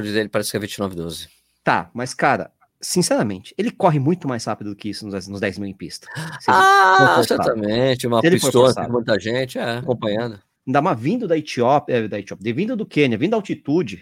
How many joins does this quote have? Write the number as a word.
one